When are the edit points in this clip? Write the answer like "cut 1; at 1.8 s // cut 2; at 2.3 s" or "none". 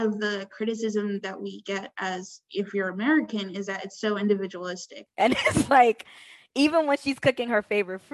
cut 1; at 5.1 s